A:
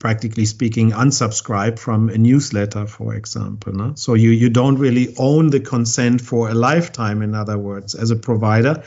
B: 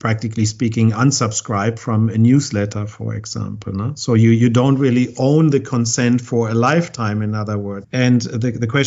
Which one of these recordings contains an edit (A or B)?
B